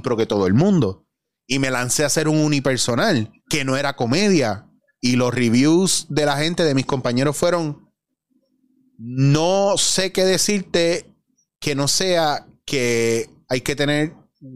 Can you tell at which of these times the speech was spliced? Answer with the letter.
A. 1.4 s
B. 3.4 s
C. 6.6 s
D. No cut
B